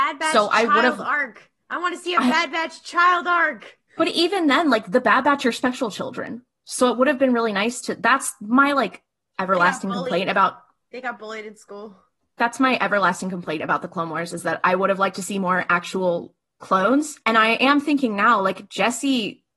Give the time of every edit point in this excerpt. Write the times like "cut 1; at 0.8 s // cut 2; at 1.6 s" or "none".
cut 1; at 17.2 s